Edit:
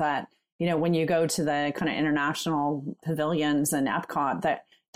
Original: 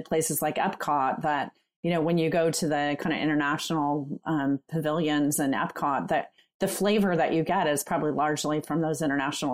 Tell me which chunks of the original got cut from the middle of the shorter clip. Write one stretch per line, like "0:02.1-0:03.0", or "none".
0:04.2-0:04.6